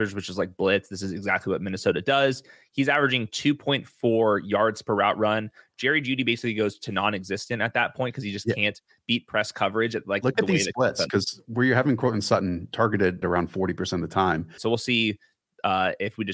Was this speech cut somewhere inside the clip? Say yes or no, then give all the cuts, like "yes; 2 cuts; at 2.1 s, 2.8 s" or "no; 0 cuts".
yes; 2 cuts; at 13.2 s, 14.6 s